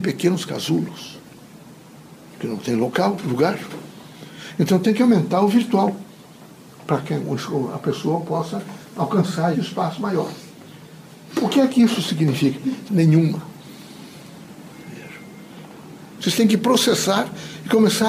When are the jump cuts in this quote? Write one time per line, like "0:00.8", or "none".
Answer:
0:09.5
0:12.9
0:16.2